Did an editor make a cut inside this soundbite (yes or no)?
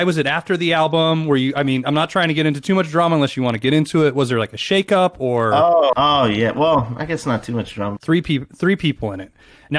yes